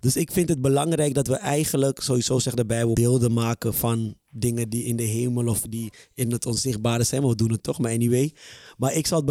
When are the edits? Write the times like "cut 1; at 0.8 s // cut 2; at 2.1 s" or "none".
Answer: cut 1; at 2.9 s